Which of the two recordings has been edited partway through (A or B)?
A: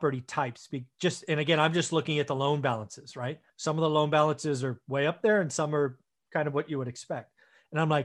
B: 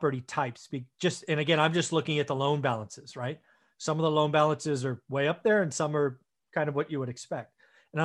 A